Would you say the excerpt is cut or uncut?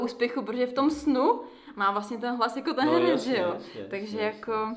uncut